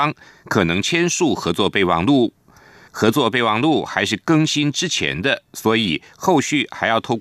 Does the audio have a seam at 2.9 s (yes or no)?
yes